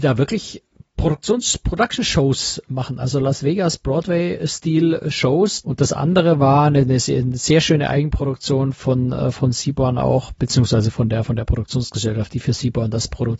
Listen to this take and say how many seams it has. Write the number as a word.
one